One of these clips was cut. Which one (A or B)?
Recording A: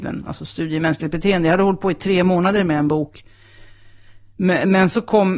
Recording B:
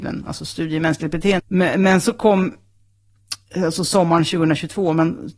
B